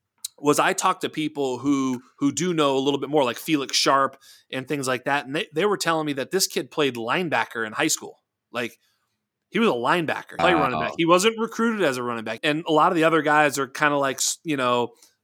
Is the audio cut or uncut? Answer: cut